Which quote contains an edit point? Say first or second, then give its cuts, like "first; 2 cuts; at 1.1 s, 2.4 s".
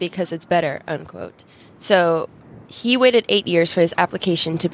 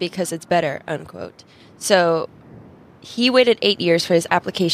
first; 1 cut; at 2.6 s